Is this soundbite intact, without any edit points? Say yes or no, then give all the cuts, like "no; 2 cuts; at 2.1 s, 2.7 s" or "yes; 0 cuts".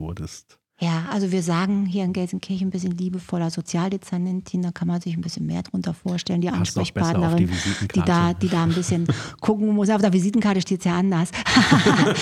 yes; 0 cuts